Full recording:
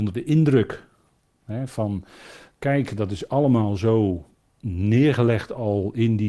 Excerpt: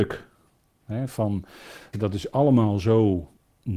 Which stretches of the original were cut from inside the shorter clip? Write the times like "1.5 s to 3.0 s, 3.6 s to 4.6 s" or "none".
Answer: 2.5 s to 2.9 s